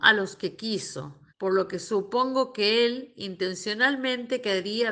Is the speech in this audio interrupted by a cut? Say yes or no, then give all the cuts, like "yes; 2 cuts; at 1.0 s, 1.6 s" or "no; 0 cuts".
yes; 1 cut; at 1.3 s